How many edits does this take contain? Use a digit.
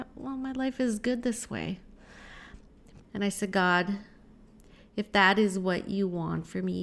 1